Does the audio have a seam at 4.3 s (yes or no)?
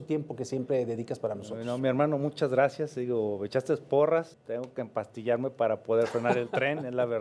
yes